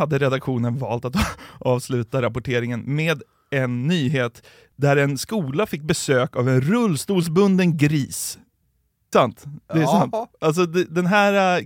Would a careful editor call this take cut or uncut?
cut